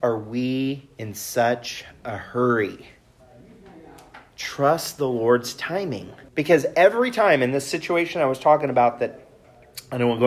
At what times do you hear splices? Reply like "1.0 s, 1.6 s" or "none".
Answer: 6.3 s